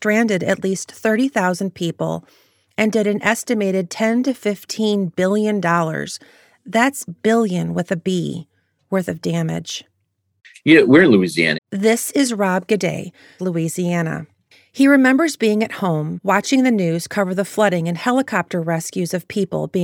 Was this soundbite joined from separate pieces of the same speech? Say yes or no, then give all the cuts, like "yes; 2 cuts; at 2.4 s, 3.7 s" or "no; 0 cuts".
yes; 2 cuts; at 11.5 s, 13.4 s